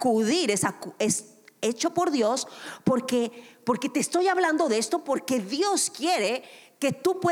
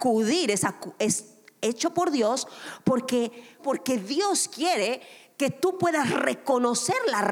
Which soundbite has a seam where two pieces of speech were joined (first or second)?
second